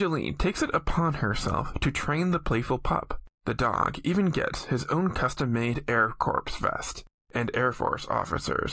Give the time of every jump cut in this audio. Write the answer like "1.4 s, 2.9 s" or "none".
3.4 s